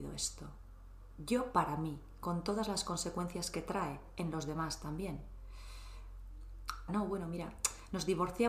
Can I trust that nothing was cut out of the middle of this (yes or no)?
no